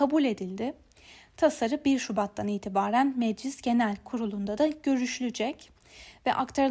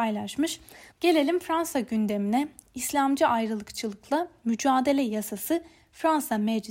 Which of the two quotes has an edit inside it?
second; 1 cut; at 0.9 s

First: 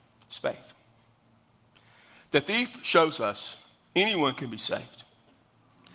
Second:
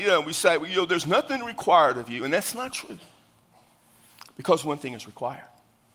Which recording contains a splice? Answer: second; 1 cut; at 2.7 s

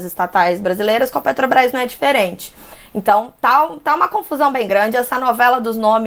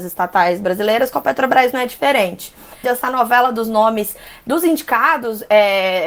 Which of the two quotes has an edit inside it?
second; 1 cut; at 2.8 s

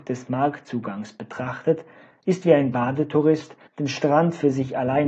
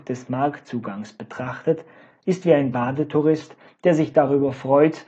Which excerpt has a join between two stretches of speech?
first; 1 cut; at 3.7 s

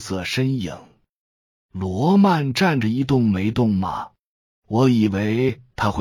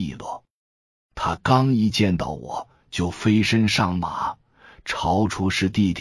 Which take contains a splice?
first; 1 cut; at 4.6 s

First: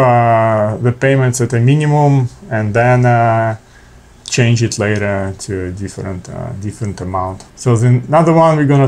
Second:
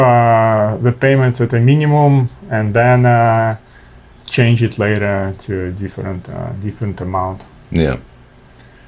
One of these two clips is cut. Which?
first; 1 cut; at 7.5 s

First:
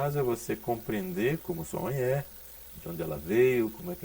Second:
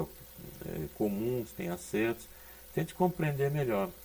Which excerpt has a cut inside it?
second; 1 cut; at 1.5 s

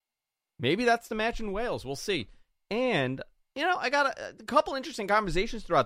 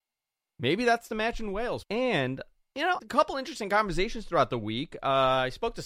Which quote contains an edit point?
second; 2 cuts; at 1.8 s, 3.0 s

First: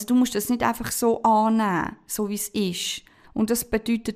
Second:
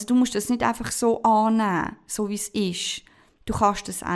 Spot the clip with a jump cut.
first; 1 cut; at 3.2 s

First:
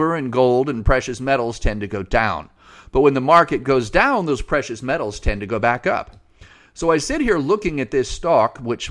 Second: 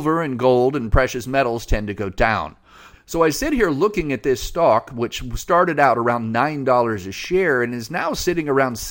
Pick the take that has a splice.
second; 1 cut; at 2.9 s

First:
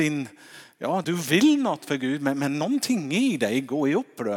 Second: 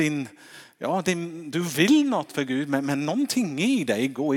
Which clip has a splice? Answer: first; 1 cut; at 1.0 s

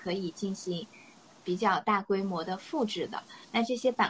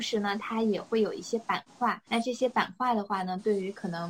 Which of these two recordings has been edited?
second; 1 cut; at 2.1 s

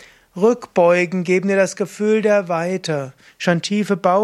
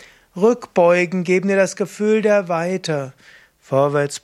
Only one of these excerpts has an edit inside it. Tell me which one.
first; 1 cut; at 3.3 s

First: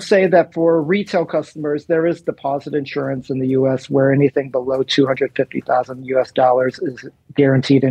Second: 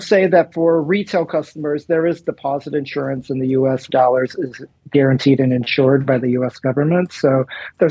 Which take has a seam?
second; 1 cut; at 3.9 s

